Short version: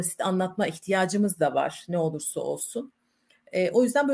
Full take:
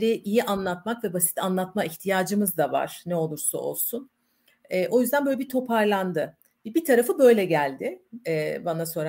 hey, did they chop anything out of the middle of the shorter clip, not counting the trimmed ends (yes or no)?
no